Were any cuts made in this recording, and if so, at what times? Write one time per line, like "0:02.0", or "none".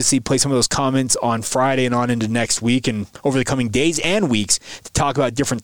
none